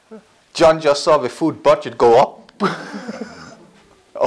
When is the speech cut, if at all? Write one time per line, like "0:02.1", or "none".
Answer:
none